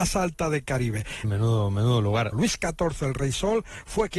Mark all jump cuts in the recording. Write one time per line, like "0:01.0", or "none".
0:01.2
0:02.3